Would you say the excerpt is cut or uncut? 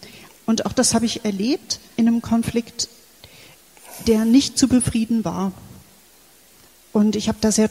cut